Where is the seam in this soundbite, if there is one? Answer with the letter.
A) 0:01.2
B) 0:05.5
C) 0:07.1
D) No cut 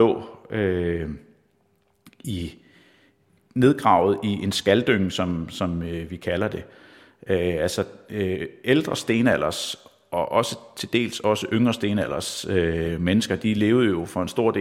D